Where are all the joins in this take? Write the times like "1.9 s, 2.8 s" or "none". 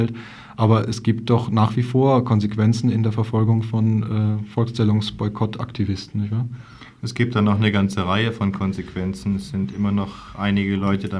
none